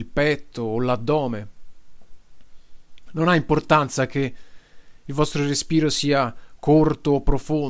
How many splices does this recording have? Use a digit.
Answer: 1